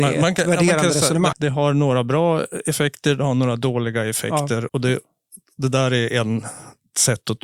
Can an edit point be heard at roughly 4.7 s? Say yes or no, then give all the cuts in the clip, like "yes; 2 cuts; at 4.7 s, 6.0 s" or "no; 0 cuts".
yes; 2 cuts; at 1.3 s, 4.7 s